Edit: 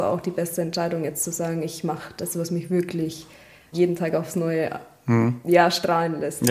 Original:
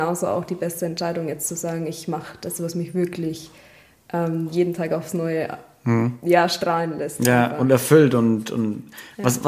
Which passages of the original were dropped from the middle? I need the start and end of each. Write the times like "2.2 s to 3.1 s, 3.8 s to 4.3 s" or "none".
4.0 s to 4.5 s